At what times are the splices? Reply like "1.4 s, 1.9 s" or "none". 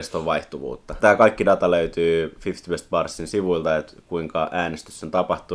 1.0 s

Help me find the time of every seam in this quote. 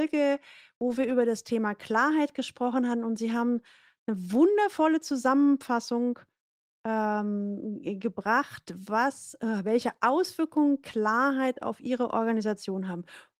none

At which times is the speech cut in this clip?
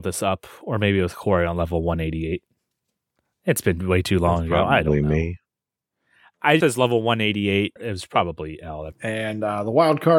6.6 s, 7.8 s, 8.9 s

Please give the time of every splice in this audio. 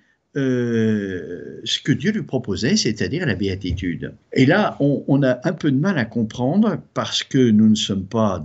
4.2 s

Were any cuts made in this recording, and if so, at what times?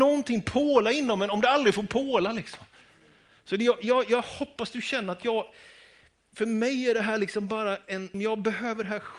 8.1 s

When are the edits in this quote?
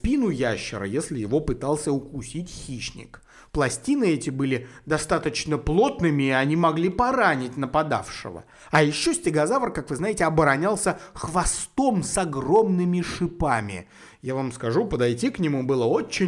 none

